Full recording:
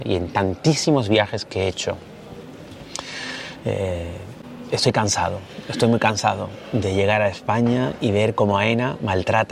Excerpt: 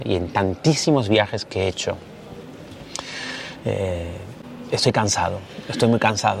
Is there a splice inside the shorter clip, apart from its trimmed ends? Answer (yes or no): no